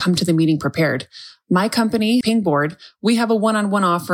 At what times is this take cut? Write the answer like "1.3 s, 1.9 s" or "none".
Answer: 2.2 s